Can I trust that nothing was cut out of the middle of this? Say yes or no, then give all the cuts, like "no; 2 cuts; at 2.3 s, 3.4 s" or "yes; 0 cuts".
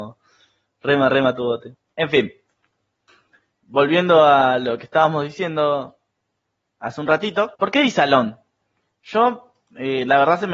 no; 2 cuts; at 1.9 s, 7.6 s